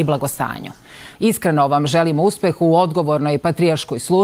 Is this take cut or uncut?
cut